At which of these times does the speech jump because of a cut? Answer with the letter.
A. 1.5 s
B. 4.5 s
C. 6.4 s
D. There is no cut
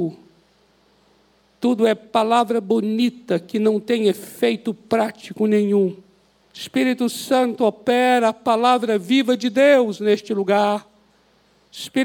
C